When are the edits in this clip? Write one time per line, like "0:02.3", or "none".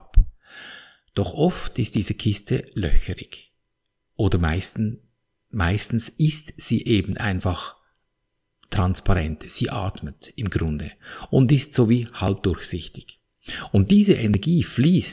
none